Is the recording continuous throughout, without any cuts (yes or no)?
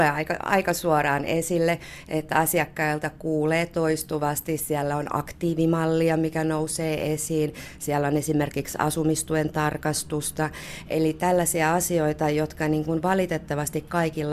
yes